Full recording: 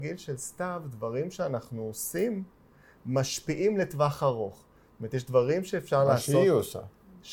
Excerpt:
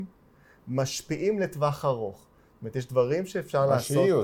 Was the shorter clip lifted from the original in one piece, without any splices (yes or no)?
yes